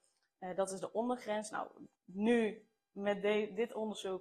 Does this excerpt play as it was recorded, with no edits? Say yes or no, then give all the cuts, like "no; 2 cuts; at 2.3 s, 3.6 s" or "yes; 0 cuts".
no; 1 cut; at 1.9 s